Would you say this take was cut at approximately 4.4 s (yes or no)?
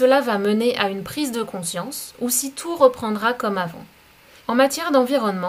yes